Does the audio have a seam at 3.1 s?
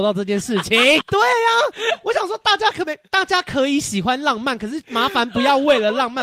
no; 1 cut; at 1.0 s

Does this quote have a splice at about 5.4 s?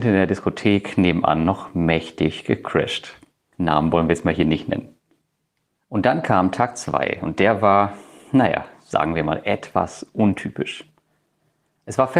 no; 0 cuts

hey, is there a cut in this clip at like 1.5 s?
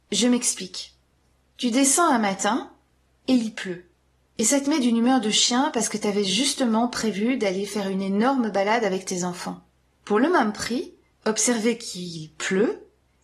no; 1 cut; at 11.1 s

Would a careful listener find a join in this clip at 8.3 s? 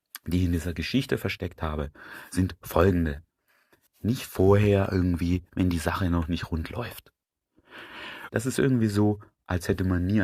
yes; 2 cuts; at 3.9 s, 8.3 s

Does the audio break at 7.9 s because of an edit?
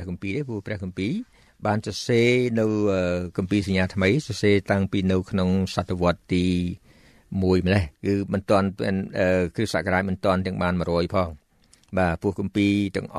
yes; 1 cut; at 7.9 s

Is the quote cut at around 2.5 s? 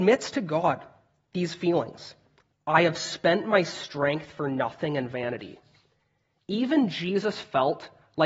yes; 1 cut; at 2.5 s

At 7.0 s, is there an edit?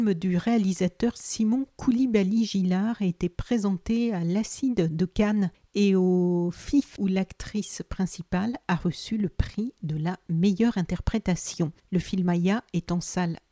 yes; 1 cut; at 7.0 s

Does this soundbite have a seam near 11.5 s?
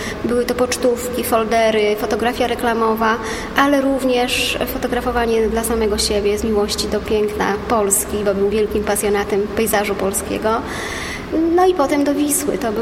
no; 1 cut; at 8.5 s

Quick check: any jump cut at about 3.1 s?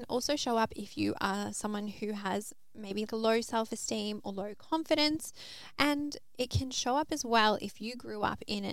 yes; 1 cut; at 3.1 s

